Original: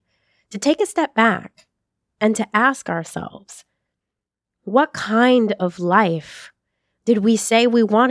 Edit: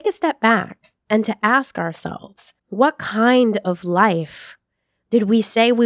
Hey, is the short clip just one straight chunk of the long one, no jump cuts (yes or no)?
no